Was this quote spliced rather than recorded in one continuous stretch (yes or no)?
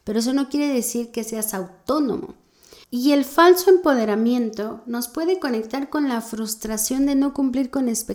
yes